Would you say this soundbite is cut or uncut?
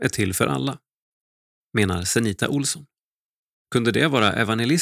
cut